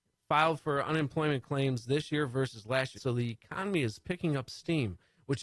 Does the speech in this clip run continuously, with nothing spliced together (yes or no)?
no